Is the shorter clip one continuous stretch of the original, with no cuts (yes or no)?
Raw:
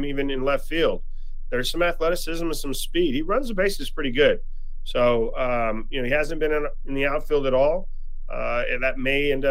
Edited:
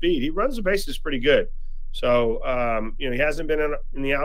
yes